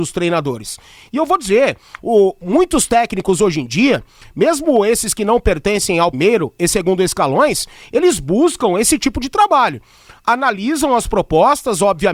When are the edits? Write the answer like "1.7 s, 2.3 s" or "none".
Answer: 6.1 s